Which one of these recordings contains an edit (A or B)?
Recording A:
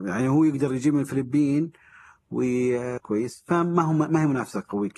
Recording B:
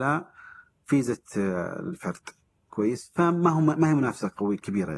A